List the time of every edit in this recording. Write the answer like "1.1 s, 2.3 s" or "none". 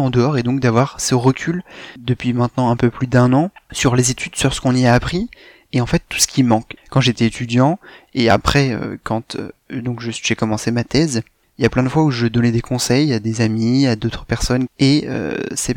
6.8 s